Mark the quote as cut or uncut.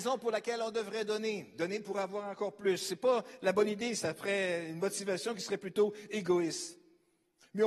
uncut